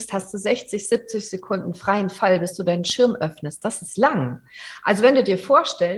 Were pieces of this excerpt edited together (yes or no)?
no